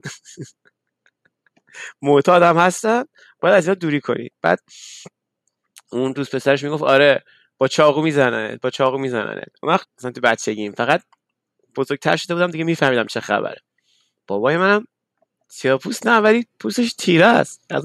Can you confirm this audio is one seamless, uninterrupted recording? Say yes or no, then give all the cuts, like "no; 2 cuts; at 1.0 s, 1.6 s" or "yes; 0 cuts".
no; 1 cut; at 9.8 s